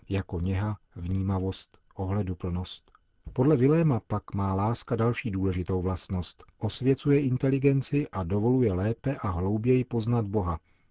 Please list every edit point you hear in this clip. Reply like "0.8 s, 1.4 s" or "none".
3.2 s, 6.5 s

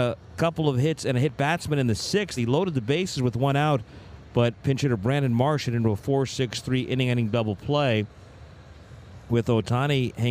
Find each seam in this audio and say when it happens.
none

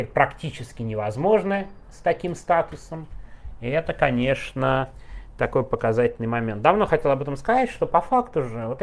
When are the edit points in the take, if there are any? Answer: none

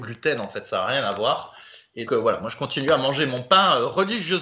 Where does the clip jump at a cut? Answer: 2.1 s

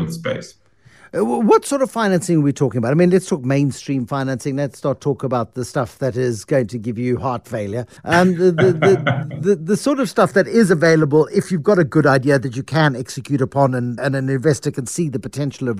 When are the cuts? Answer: 8.0 s, 14.0 s

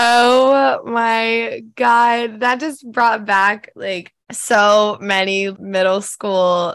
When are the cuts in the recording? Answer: 4.2 s, 5.5 s

